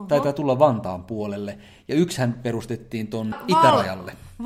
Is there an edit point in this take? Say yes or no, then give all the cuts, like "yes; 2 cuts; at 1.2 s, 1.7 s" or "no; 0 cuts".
yes; 1 cut; at 3.3 s